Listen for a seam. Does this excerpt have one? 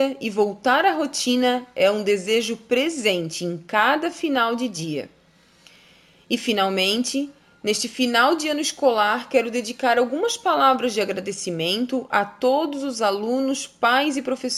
no; 0 cuts

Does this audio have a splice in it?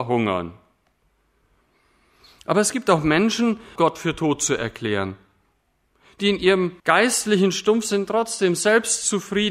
yes; 2 cuts; at 3.8 s, 6.8 s

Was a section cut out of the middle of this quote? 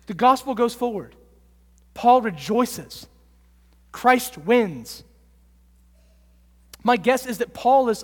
no; 0 cuts

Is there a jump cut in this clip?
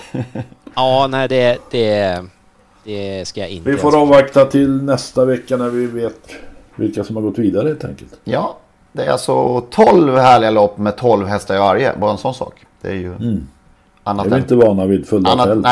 no; 0 cuts

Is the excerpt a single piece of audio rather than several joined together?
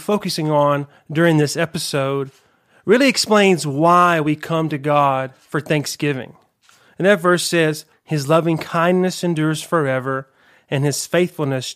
no; 1 cut; at 7.9 s

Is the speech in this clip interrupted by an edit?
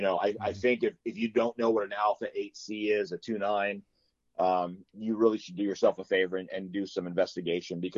no; 0 cuts

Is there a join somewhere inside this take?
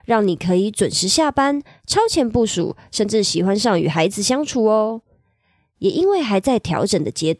no; 0 cuts

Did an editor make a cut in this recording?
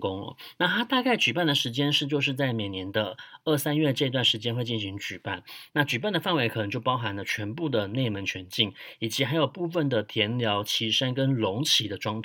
no; 0 cuts

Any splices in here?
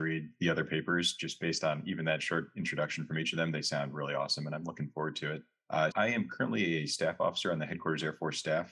yes; 1 cut; at 5.9 s

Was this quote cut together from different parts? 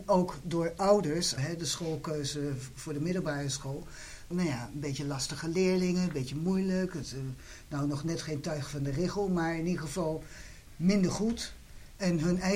yes; 2 cuts; at 1.4 s, 4.3 s

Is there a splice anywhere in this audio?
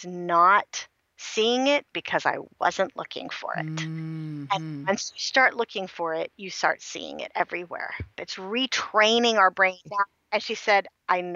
yes; 2 cuts; at 8.1 s, 9.8 s

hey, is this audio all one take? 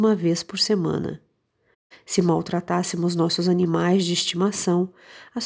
no; 1 cut; at 1.9 s

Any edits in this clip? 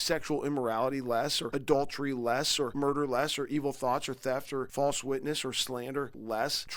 no; 0 cuts

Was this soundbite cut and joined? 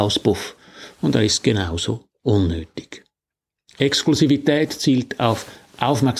no; 0 cuts

